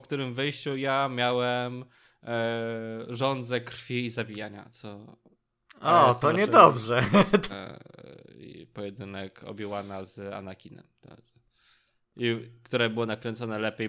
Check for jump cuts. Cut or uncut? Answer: cut